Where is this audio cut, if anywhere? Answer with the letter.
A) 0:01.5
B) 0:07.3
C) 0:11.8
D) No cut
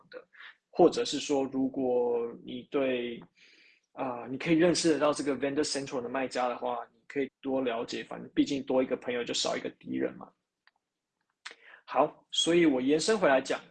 B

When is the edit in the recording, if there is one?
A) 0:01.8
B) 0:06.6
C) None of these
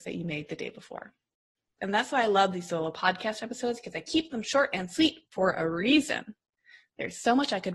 A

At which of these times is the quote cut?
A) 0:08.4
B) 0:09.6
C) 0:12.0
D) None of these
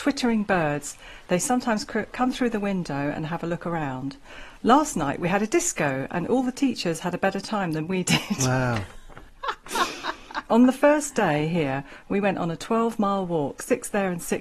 D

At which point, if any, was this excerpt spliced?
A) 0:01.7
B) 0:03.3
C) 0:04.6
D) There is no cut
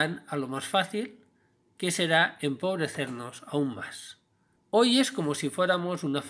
C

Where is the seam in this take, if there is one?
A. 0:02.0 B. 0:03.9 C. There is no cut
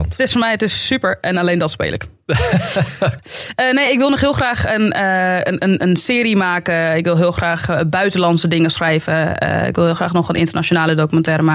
C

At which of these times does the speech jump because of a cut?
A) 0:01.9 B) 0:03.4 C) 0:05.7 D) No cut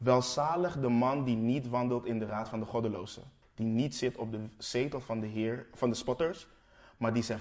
B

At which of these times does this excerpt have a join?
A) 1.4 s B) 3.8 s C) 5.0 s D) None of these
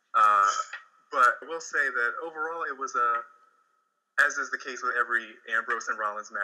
A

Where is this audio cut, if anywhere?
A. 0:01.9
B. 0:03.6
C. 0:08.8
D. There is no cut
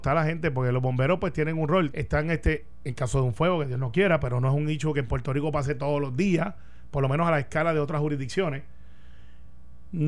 A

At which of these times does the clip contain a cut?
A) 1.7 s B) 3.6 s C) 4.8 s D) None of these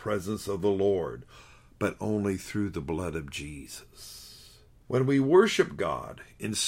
C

